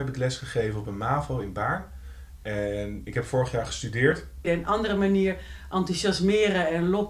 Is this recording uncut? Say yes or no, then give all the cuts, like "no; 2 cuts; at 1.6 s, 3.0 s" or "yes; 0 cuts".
no; 1 cut; at 4.4 s